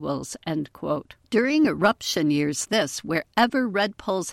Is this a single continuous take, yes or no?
no